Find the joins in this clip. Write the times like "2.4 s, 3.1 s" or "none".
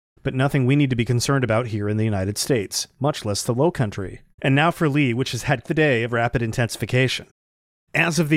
4.3 s, 5.6 s